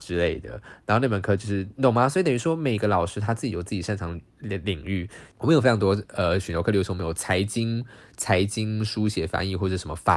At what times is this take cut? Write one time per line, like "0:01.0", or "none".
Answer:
0:05.3